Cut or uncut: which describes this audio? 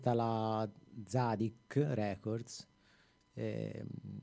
uncut